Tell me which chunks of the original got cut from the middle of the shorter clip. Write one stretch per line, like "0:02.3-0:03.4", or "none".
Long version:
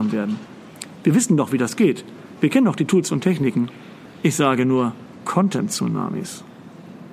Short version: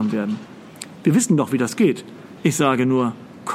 0:02.4-0:04.2